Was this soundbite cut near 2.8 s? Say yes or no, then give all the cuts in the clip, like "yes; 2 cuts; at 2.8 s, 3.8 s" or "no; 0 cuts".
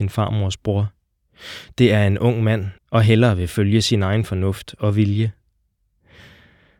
yes; 1 cut; at 2.8 s